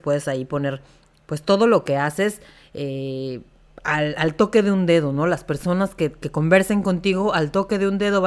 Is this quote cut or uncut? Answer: uncut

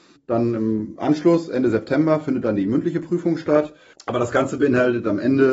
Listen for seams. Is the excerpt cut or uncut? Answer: cut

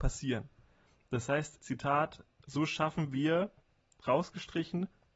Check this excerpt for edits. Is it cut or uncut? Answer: cut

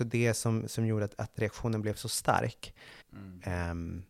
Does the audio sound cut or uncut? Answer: cut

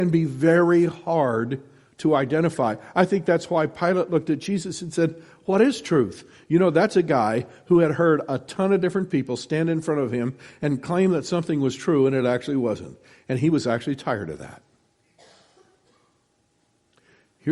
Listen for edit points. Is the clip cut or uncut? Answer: uncut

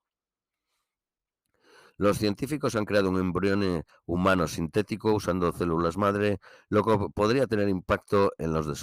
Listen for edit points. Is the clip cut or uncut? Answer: uncut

